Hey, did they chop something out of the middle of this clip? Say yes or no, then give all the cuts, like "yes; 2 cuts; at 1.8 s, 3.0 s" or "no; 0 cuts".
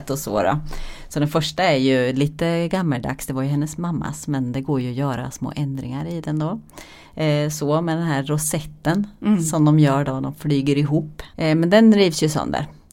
yes; 1 cut; at 11.3 s